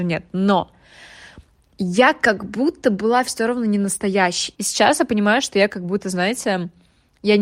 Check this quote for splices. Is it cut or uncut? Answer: cut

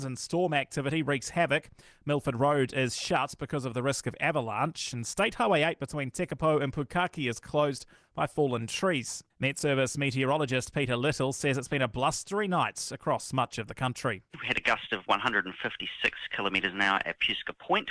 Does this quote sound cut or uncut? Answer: cut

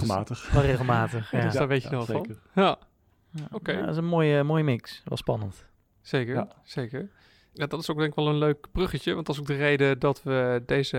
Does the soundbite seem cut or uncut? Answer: uncut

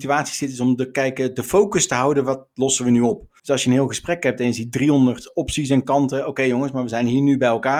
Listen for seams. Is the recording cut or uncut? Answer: cut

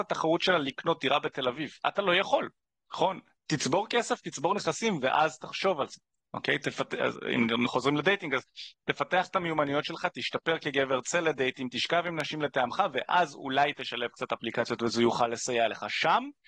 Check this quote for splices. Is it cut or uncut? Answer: cut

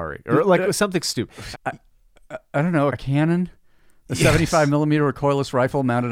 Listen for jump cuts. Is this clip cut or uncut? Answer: cut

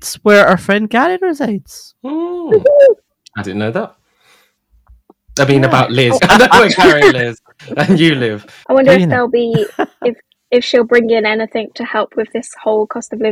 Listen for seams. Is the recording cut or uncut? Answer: cut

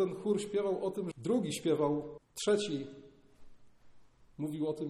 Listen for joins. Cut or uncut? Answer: cut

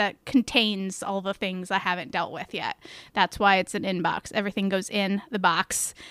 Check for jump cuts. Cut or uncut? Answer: uncut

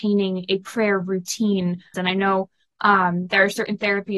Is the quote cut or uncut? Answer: cut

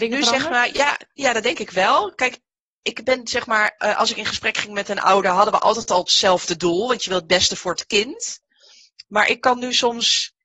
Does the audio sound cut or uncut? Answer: uncut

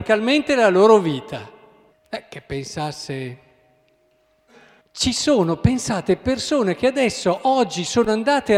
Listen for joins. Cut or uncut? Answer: cut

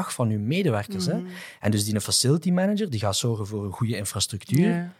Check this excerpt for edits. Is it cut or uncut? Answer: uncut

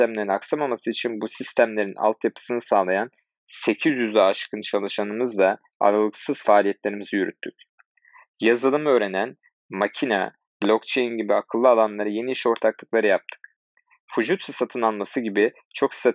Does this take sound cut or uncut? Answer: cut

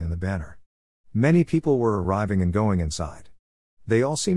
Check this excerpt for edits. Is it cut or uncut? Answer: uncut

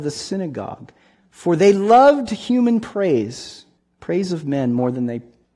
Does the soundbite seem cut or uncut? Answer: uncut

